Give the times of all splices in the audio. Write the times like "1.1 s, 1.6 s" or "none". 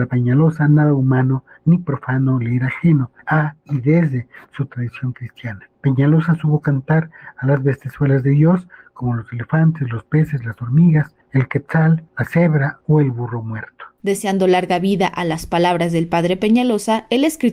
none